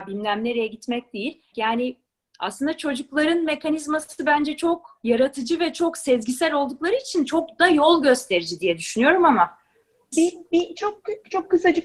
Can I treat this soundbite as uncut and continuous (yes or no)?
no